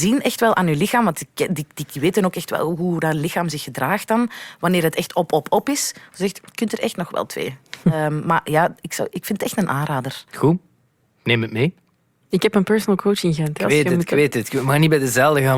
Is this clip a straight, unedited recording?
no; 1 cut; at 10.3 s

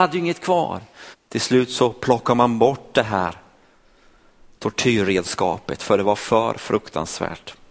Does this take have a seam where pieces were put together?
yes; 1 cut; at 1.1 s

